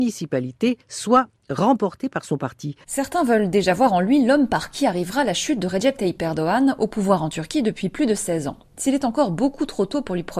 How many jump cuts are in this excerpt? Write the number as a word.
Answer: one